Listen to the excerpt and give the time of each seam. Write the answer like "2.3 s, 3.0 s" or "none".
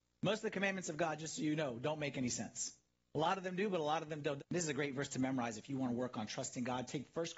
4.4 s